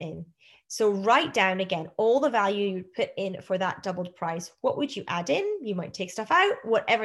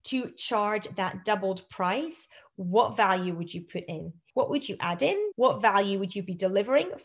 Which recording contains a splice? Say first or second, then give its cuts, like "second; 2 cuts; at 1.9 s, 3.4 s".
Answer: second; 2 cuts; at 4.3 s, 5.3 s